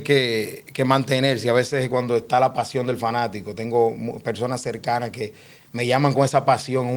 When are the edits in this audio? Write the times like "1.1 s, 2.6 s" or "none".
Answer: none